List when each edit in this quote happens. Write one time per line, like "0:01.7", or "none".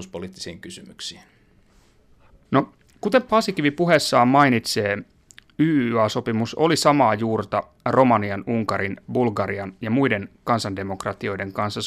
none